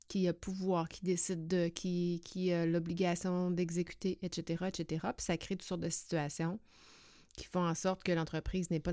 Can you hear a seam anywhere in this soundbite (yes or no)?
no